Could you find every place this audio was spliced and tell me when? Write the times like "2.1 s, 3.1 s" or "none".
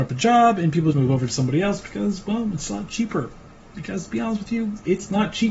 0.9 s